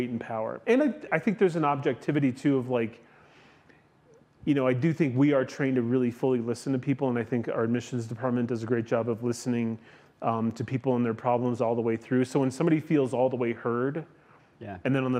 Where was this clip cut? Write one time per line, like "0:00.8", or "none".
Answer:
0:01.1